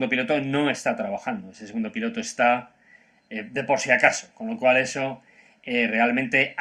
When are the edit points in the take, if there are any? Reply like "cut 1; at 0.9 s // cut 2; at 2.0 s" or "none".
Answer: none